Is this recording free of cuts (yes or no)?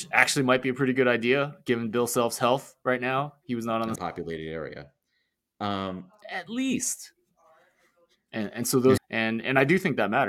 no